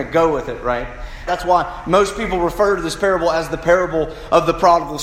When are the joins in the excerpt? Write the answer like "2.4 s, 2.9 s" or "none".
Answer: 1.3 s